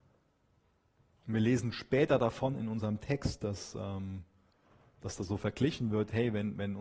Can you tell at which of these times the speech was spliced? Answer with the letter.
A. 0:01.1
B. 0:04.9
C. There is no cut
A